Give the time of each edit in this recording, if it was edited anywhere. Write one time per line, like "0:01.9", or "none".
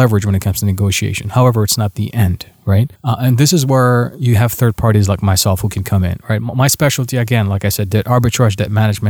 0:03.0